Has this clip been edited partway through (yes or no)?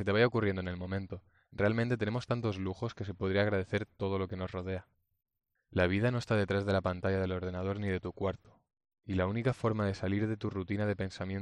no